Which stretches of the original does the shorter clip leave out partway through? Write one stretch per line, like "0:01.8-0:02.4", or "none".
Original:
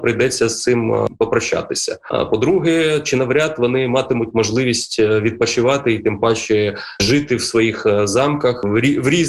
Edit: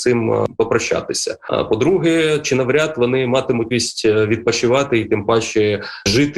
0:04.3-0:04.6